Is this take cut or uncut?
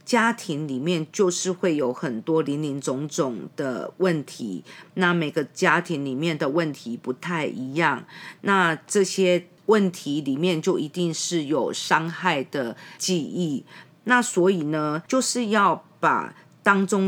cut